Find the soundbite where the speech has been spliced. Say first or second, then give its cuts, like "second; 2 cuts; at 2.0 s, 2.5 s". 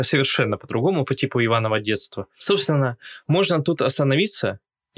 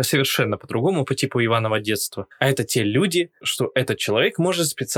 second; 2 cuts; at 2.3 s, 3.4 s